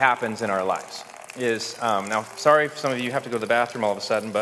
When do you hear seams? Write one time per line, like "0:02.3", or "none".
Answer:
none